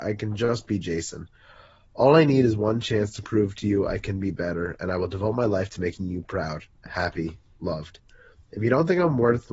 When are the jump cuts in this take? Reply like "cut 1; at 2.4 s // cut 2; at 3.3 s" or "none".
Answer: none